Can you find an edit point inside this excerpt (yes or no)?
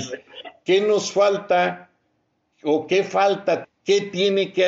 yes